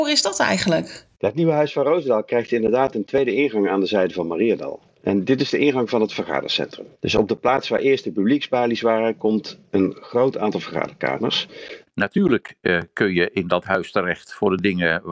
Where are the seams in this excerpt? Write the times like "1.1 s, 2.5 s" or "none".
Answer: 11.9 s